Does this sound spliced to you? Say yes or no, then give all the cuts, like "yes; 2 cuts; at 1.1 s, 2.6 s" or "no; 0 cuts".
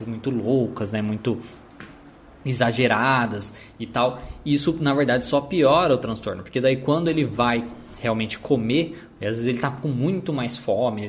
no; 0 cuts